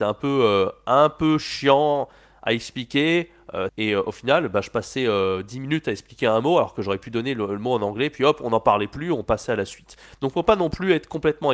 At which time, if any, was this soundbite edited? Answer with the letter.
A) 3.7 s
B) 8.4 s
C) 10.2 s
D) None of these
A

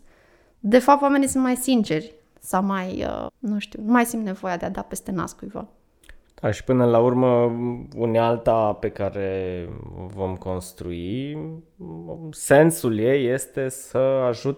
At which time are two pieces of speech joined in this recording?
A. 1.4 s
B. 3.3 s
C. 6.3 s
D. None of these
B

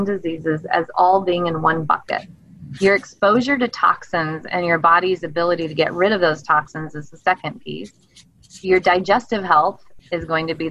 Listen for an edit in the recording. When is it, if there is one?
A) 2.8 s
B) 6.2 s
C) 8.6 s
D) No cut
A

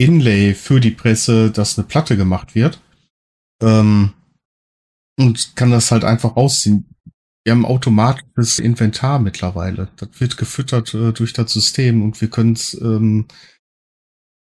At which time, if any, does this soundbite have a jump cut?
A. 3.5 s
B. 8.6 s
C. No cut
B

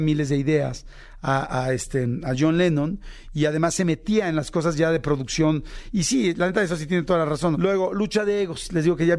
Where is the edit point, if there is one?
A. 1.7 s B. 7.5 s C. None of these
B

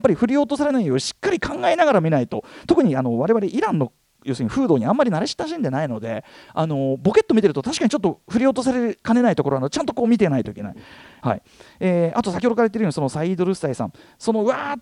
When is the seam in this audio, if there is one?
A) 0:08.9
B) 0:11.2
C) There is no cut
B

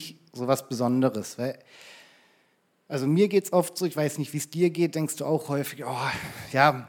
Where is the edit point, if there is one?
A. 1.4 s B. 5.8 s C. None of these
C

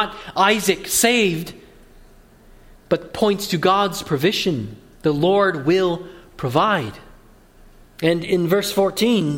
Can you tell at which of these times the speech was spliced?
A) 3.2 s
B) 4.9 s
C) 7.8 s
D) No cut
C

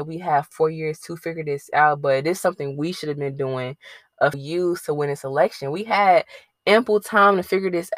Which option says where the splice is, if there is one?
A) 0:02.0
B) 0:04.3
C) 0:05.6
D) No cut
B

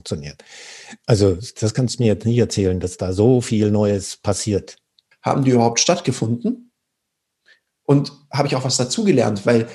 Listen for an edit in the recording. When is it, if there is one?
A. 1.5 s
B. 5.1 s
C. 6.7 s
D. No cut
B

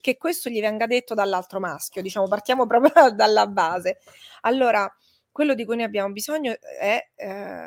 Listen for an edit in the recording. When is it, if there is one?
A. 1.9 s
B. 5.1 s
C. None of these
C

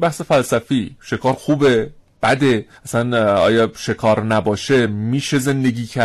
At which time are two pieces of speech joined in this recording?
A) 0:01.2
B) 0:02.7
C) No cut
B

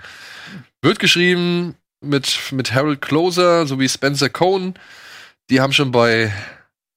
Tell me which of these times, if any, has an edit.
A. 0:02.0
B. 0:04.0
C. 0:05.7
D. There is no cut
A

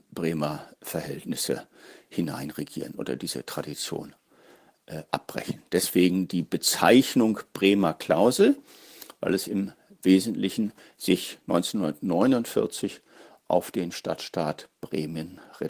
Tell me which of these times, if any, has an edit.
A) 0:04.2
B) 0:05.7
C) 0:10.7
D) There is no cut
D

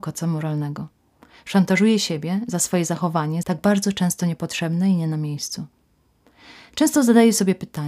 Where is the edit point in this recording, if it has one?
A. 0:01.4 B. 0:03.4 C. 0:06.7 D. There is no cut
B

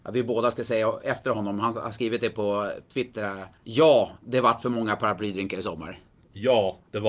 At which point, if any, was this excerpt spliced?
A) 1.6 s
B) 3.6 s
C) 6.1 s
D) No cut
B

